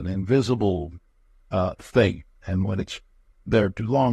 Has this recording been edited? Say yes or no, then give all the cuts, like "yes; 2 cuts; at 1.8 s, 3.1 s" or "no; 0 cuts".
no; 0 cuts